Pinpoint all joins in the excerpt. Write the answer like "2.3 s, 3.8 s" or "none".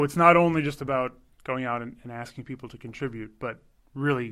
none